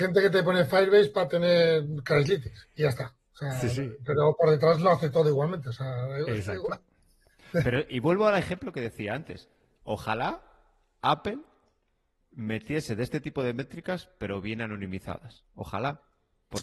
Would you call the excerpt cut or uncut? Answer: uncut